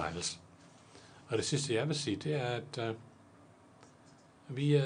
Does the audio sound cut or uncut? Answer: cut